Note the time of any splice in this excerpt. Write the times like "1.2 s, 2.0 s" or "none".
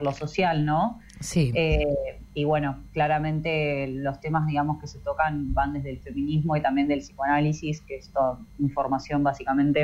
none